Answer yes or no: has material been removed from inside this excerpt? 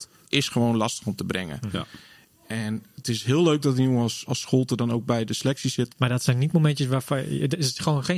yes